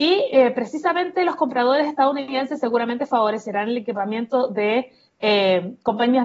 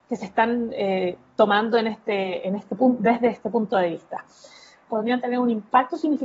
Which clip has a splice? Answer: second; 1 cut; at 4.9 s

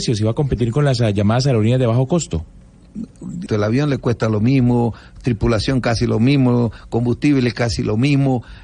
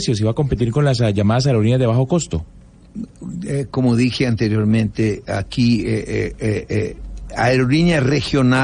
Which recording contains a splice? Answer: first; 1 cut; at 3.5 s

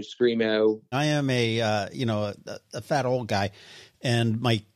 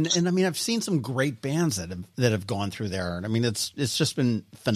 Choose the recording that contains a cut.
first; 1 cut; at 0.9 s

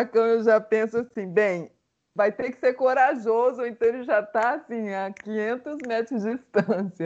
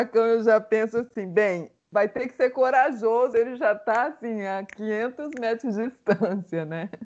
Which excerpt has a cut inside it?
second; 2 cuts; at 1.8 s, 3.3 s

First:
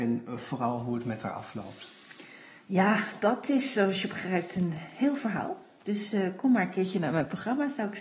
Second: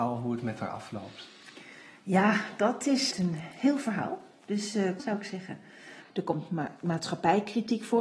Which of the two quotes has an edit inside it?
second; 3 cuts; at 3.1 s, 5.0 s, 6.0 s

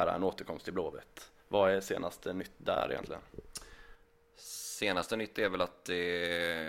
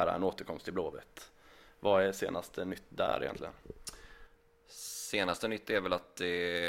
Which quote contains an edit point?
first; 1 cut; at 1.4 s

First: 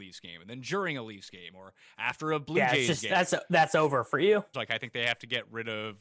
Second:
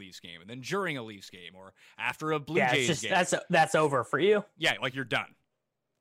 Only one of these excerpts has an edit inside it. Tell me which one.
first; 1 cut; at 4.5 s

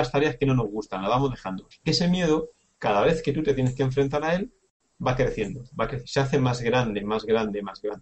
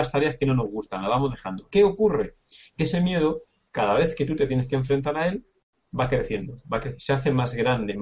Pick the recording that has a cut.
first; 1 cut; at 1.7 s

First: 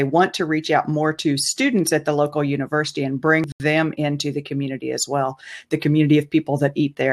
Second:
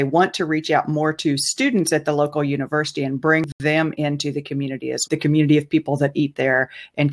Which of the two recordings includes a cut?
second; 1 cut; at 5.1 s

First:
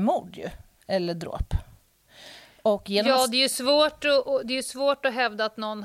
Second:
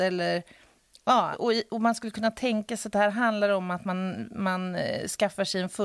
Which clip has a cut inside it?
second; 1 cut; at 1.3 s

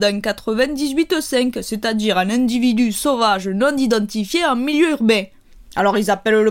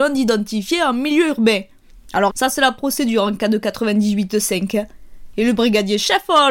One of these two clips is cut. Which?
second; 1 cut; at 2.3 s

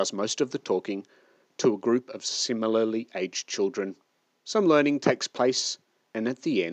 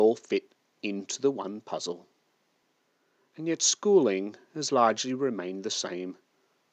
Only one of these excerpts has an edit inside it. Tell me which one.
second; 1 cut; at 3.3 s

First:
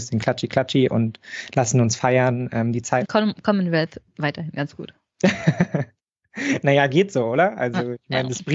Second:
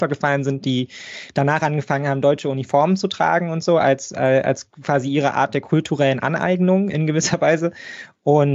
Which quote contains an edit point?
first; 1 cut; at 3.0 s

